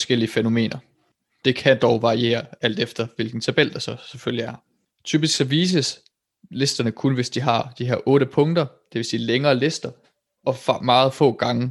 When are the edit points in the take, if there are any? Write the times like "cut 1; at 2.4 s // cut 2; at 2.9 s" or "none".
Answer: cut 1; at 1.4 s // cut 2; at 4.9 s